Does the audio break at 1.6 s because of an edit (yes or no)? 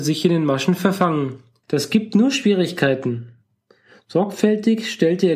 yes